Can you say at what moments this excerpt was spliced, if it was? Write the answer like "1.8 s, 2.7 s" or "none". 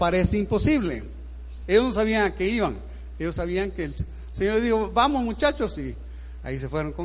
1.6 s